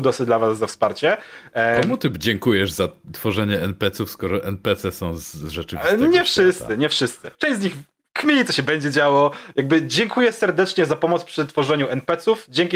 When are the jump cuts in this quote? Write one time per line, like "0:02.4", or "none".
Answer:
0:07.3